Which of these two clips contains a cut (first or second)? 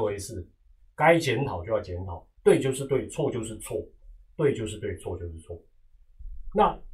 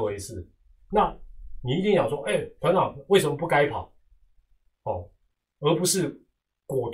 second